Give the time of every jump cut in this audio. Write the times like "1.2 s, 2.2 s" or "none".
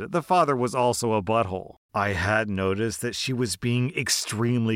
1.8 s

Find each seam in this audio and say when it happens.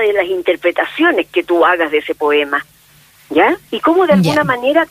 3.7 s

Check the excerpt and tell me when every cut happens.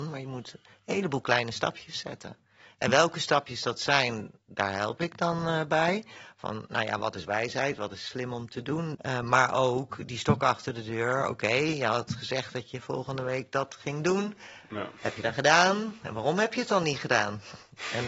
8.9 s

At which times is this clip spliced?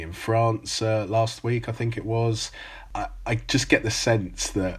none

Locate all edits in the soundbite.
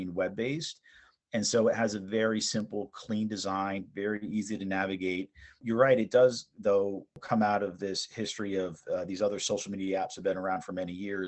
none

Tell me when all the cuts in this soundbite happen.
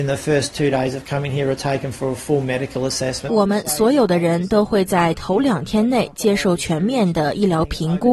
3.3 s

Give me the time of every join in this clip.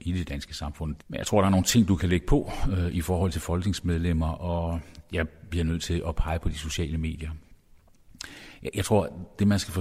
none

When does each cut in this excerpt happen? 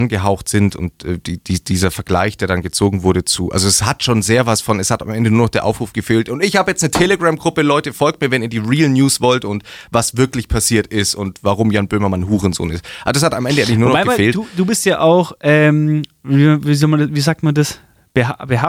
none

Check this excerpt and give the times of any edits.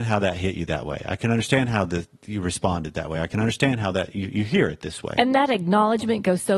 none

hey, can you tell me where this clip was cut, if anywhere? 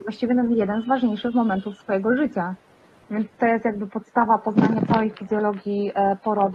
3.0 s

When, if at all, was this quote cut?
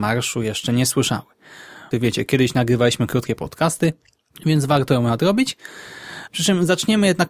1.9 s, 6.3 s

